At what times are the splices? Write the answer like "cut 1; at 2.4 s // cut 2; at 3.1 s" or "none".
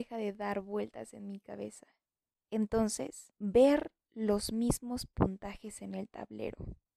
cut 1; at 2.3 s